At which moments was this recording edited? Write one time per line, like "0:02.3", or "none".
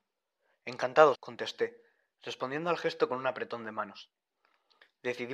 0:01.1